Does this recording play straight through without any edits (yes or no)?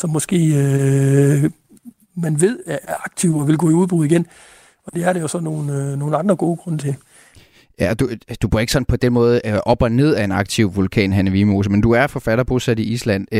yes